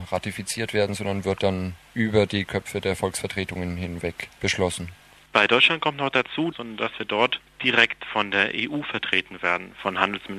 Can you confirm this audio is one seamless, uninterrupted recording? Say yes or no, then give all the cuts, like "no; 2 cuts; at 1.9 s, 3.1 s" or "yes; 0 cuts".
no; 2 cuts; at 5.3 s, 6.5 s